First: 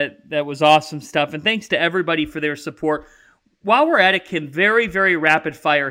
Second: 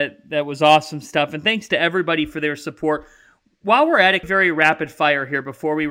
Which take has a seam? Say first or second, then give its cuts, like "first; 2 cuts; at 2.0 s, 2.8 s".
second; 1 cut; at 4.2 s